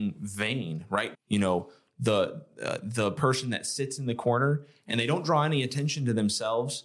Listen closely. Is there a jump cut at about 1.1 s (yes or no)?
yes